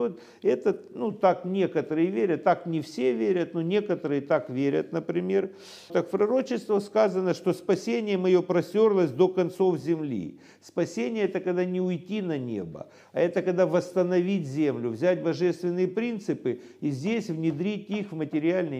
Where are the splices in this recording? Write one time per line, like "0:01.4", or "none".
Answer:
0:05.9

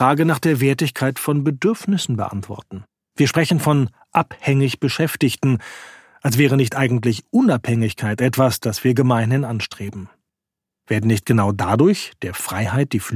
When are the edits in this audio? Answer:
0:03.0
0:10.7

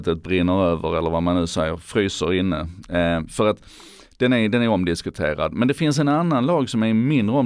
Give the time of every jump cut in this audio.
none

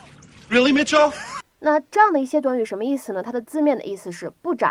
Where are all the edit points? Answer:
0:01.4

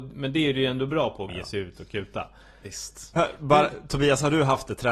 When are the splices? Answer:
0:01.3
0:03.2

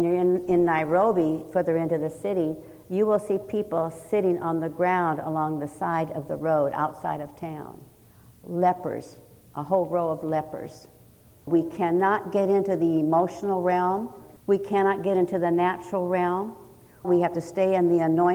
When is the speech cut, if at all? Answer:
0:11.5
0:14.4
0:17.0

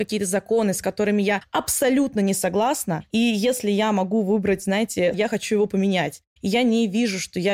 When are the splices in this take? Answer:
0:05.1
0:06.3

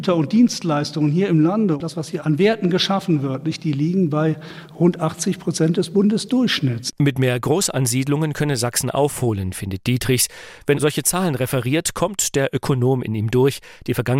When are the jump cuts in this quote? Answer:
0:02.2
0:10.7

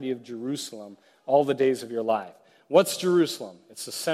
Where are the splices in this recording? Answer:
none

